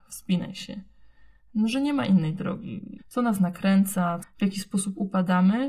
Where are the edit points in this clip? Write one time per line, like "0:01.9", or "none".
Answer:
0:03.0
0:04.2

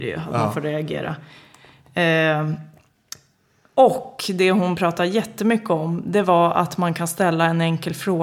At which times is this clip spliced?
none

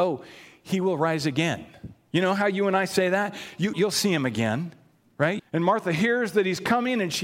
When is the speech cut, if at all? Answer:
0:03.7
0:05.4

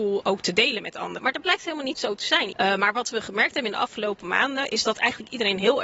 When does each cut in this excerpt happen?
0:01.2
0:02.5

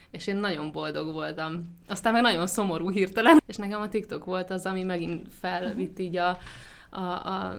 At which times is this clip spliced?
0:03.4

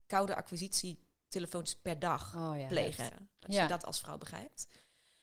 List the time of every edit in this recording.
0:03.1

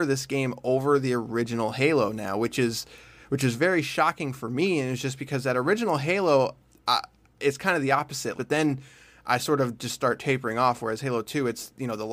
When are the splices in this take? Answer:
0:08.3

